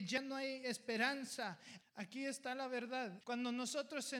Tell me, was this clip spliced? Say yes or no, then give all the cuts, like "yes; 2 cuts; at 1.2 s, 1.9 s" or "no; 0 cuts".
yes; 2 cuts; at 1.8 s, 3.2 s